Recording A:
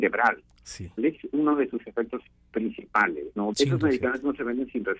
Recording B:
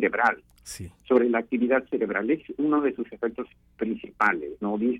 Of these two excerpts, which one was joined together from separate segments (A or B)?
A